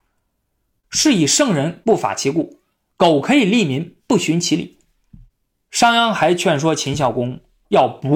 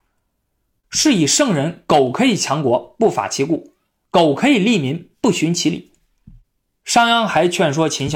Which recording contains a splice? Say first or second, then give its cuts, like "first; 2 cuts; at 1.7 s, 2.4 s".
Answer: first; 1 cut; at 1.8 s